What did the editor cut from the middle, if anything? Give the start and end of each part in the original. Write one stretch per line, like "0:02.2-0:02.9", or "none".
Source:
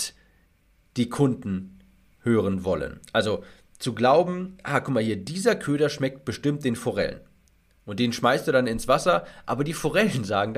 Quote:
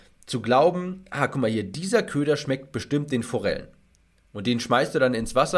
none